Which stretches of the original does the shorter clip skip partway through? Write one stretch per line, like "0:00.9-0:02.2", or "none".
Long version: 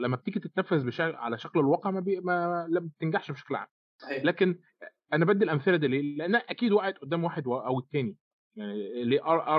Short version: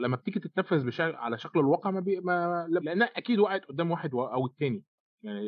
0:02.8-0:06.1